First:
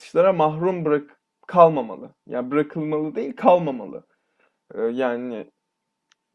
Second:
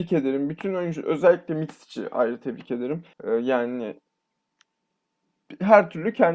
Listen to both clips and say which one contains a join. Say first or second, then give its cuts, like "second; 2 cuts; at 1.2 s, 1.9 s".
second; 1 cut; at 3.1 s